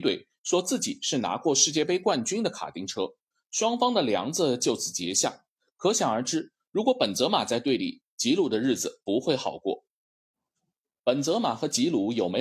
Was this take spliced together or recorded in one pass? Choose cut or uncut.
uncut